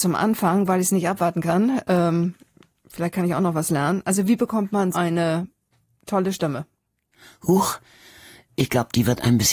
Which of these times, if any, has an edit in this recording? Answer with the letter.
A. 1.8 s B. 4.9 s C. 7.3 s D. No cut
B